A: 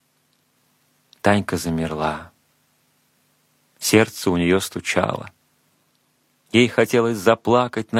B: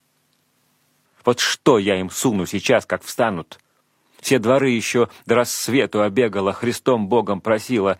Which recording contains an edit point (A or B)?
B